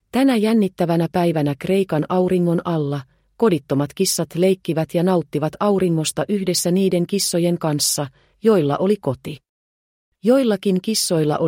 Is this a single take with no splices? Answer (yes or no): no